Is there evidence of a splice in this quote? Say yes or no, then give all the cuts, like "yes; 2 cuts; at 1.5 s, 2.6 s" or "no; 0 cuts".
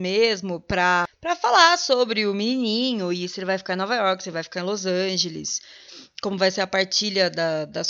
no; 0 cuts